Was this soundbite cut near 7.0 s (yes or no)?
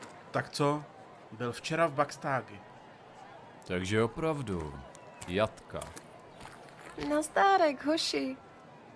no